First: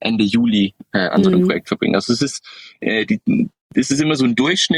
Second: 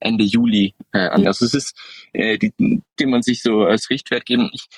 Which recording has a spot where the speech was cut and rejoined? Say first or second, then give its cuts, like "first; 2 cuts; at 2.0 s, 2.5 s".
second; 2 cuts; at 1.2 s, 3.0 s